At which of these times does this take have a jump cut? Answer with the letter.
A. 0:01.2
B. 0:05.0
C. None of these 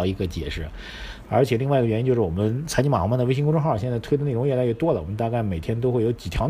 A